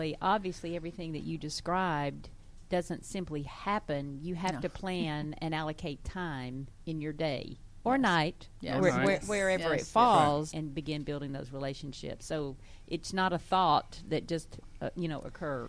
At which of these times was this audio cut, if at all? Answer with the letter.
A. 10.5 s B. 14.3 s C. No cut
A